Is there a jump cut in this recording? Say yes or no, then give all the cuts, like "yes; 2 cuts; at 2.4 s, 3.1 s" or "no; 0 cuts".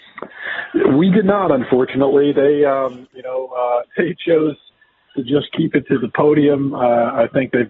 no; 0 cuts